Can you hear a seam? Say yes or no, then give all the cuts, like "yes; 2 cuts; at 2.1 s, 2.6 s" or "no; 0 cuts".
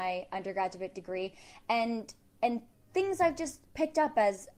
no; 0 cuts